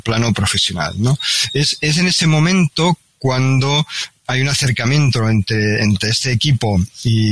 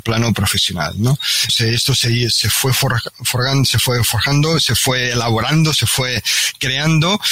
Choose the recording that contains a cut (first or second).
second